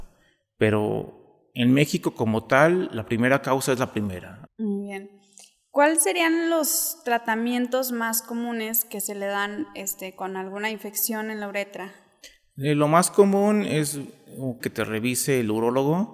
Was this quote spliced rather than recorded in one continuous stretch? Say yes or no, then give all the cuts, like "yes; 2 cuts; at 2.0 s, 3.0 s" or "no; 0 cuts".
yes; 2 cuts; at 4.5 s, 14.6 s